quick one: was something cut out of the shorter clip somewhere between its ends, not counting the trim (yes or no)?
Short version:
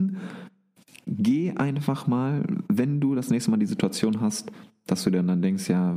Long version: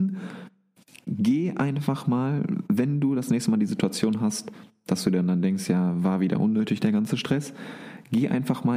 no